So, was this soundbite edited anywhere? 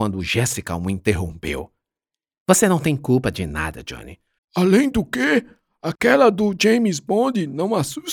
yes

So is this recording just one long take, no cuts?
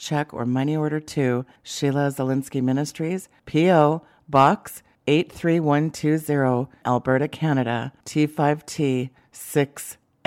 no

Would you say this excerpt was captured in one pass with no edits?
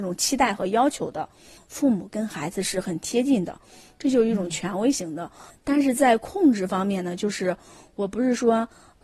no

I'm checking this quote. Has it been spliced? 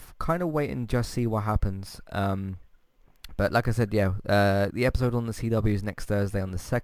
yes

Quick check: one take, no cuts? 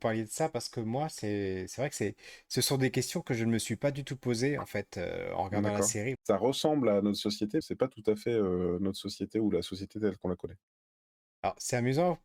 no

